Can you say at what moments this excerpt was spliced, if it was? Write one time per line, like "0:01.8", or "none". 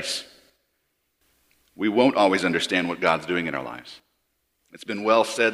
0:04.6